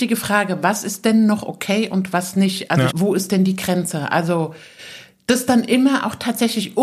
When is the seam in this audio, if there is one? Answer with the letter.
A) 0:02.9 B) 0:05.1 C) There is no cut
A